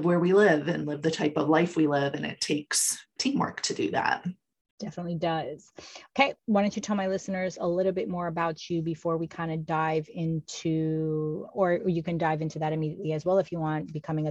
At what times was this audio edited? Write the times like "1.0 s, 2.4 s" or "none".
none